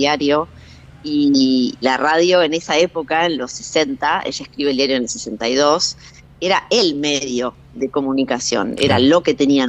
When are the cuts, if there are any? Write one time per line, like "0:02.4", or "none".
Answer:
0:01.8
0:07.7